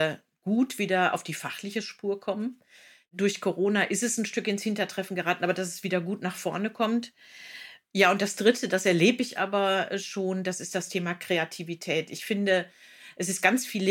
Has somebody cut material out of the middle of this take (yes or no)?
no